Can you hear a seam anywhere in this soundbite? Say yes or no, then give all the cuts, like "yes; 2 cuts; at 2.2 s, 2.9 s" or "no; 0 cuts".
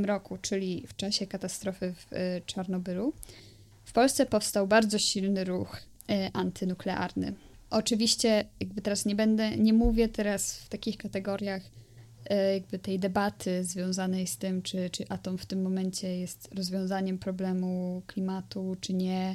no; 0 cuts